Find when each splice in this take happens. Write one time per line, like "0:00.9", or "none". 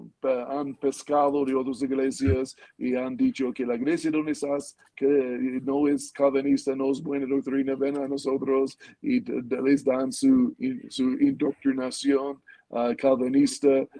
none